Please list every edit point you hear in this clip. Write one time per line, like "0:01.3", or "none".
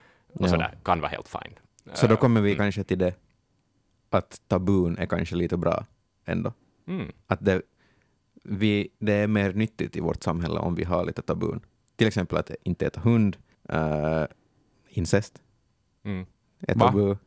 none

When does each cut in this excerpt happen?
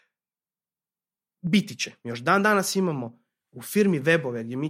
0:02.0

